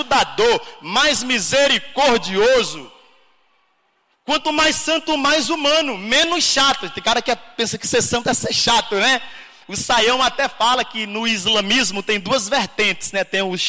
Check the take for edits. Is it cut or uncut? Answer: uncut